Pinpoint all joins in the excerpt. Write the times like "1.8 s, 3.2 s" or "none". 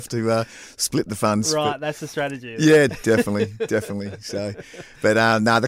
2.9 s